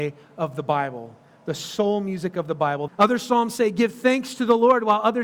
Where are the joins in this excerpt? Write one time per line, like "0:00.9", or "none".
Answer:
0:02.9

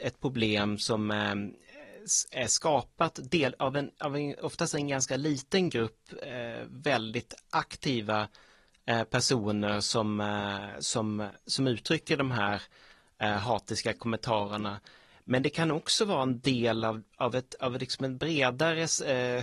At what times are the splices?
none

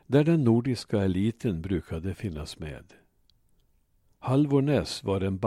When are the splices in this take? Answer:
none

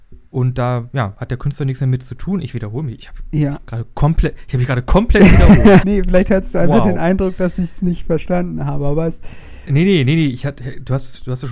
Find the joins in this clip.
0:05.8

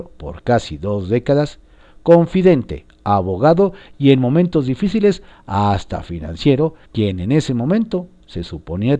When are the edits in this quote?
0:06.8

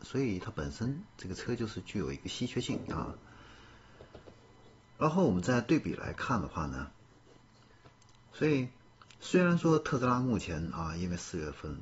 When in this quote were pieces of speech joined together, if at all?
0:08.2

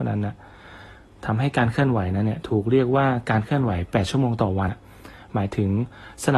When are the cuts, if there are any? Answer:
0:04.7

